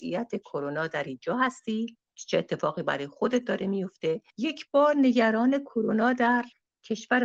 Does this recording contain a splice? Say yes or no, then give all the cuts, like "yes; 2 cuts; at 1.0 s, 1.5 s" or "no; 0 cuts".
yes; 1 cut; at 4.3 s